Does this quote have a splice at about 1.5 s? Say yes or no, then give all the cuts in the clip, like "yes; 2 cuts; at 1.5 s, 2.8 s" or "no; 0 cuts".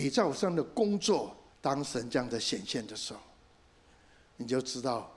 yes; 1 cut; at 1.5 s